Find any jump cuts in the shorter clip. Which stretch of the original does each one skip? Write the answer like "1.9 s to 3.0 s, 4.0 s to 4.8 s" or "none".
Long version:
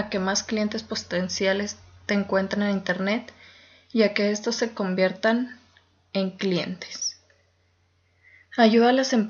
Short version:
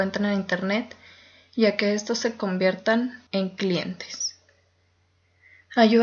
5.6 s to 6.1 s

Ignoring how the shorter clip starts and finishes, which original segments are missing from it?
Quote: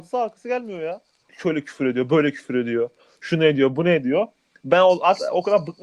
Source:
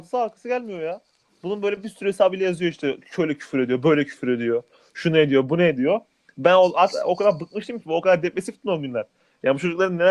1.3 s to 3.0 s

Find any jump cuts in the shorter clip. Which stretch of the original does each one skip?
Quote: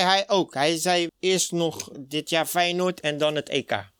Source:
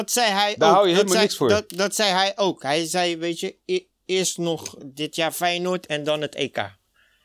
3.2 s to 3.9 s

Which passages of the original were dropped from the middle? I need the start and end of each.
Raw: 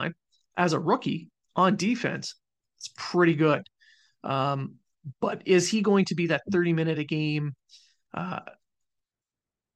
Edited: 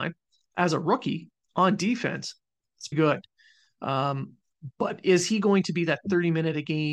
2.9 s to 3.3 s

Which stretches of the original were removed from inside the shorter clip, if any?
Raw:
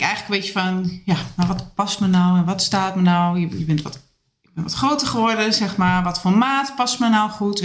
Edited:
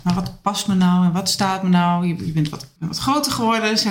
4.1 s to 4.5 s

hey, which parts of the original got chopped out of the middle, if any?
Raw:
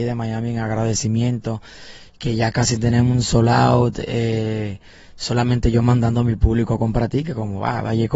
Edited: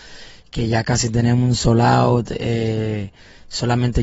none

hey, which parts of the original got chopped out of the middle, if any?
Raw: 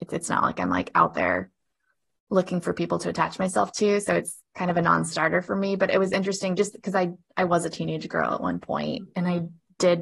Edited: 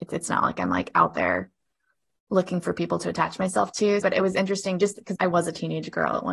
4.0 s to 5.8 s, 6.9 s to 7.3 s

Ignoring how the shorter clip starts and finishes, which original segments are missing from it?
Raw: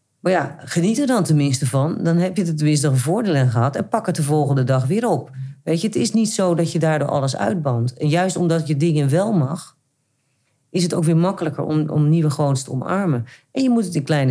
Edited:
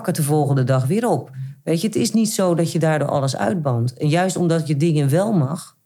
none

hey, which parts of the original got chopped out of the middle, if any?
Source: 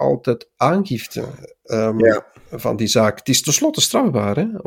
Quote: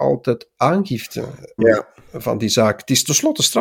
1.6 s to 2.0 s

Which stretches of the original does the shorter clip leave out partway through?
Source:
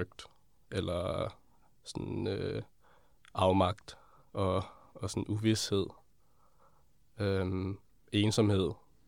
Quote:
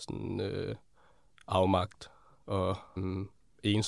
4.8 s to 7.4 s

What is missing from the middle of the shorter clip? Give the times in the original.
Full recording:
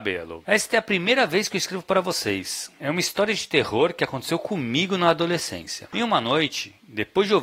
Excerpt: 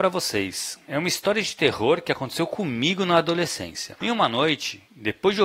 none

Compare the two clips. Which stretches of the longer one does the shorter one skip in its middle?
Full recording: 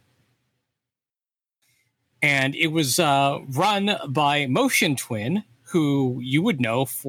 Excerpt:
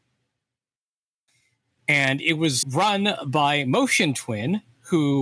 3.0 s to 3.4 s

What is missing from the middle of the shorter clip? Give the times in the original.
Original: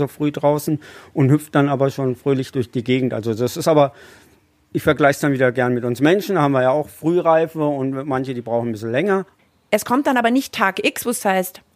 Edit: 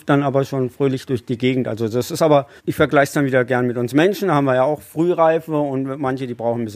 4.0 s to 4.6 s

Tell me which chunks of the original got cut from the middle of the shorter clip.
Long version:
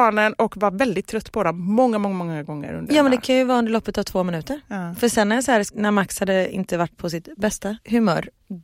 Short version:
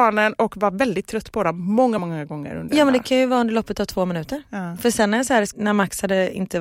2.0 s to 2.2 s

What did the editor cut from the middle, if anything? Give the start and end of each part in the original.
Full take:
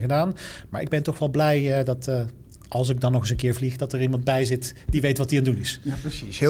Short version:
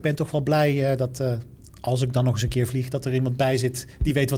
none

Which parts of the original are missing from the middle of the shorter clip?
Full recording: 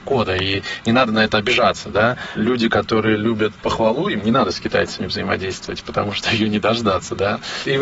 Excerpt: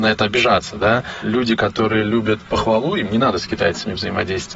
none

